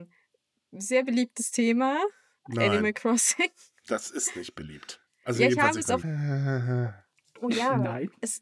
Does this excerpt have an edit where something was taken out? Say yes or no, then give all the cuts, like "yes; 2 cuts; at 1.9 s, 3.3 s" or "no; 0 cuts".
yes; 1 cut; at 6.0 s